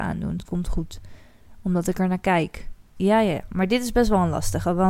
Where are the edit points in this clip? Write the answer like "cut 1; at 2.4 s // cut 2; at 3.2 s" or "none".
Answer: cut 1; at 3.0 s